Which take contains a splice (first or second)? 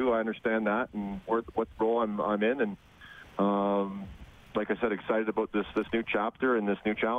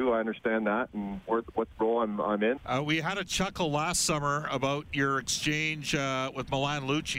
second